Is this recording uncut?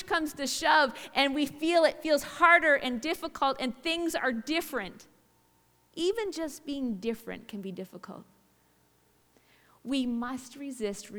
yes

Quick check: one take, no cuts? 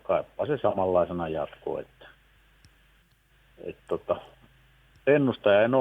yes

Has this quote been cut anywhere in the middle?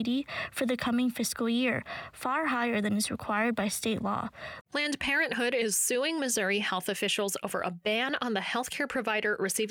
yes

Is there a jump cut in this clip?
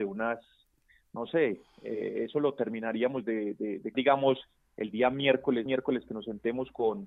yes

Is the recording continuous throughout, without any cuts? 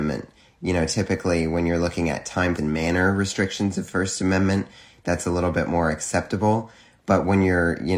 no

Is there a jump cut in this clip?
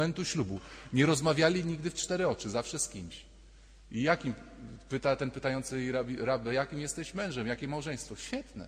no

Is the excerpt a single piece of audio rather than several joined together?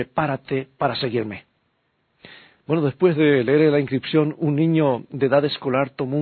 yes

